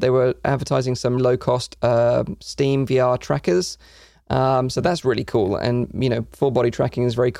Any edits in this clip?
yes; 1 cut; at 1.2 s

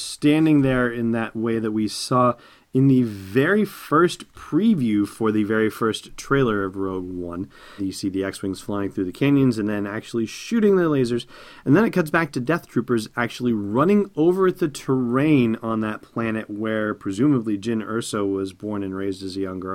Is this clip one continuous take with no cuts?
no; 1 cut; at 7.8 s

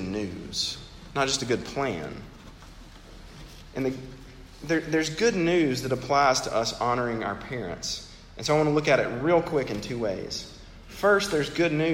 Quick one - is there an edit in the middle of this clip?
no; 0 cuts

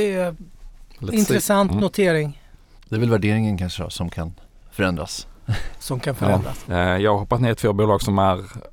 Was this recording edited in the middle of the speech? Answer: yes; 1 cut; at 6.7 s

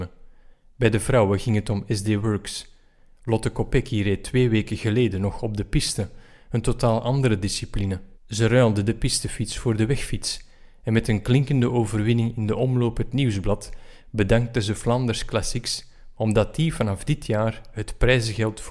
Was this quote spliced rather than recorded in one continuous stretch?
yes; 2 cuts; at 8.1 s, 16.1 s

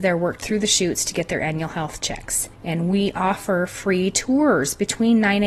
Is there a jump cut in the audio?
yes; 1 cut; at 2.5 s

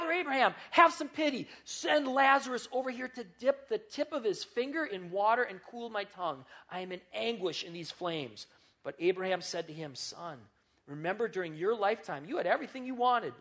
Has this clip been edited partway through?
no; 0 cuts

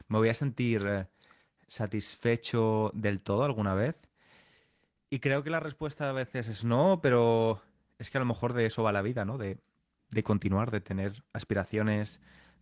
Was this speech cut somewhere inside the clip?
no; 0 cuts

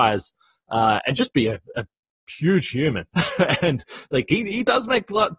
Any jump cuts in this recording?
no; 0 cuts

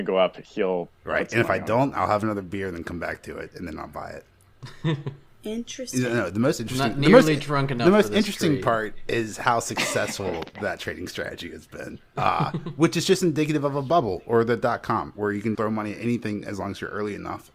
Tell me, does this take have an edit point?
yes; 2 cuts; at 12.1 s, 15.5 s

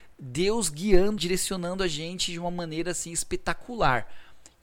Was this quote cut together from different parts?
yes; 1 cut; at 1.2 s

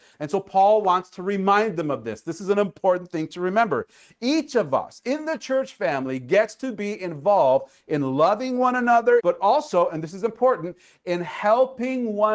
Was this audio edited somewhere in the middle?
yes; 1 cut; at 9.2 s

